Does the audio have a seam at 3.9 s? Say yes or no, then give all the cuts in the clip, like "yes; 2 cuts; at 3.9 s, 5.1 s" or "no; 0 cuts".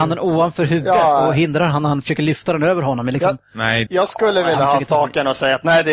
yes; 1 cut; at 3.9 s